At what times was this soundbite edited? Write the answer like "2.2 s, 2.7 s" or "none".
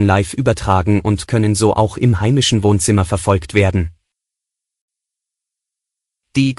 none

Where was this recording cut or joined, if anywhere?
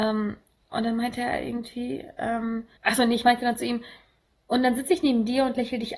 2.8 s

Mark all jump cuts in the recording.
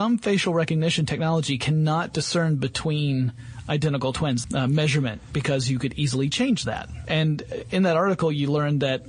4.4 s, 7.1 s

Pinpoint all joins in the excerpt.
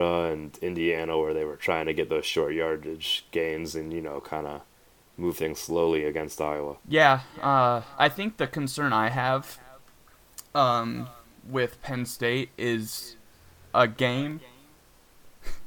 6.8 s

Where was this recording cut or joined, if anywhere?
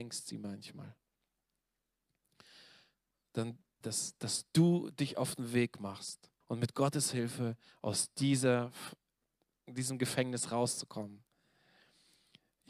3.8 s, 6.4 s

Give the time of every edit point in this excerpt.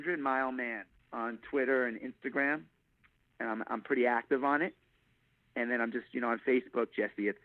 none

